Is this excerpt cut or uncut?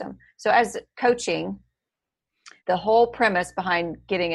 cut